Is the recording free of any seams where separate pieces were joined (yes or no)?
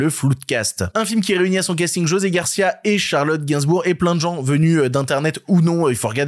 yes